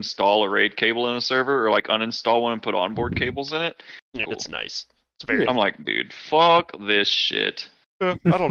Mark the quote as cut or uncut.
cut